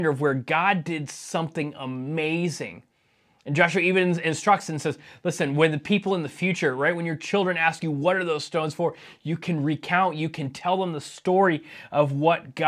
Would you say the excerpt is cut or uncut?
uncut